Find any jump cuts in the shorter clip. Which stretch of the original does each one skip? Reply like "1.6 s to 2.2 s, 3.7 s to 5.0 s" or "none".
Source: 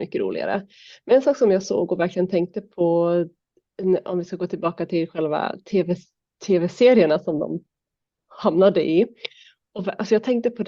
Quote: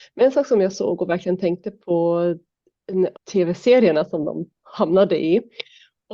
4.0 s to 6.3 s, 7.7 s to 8.2 s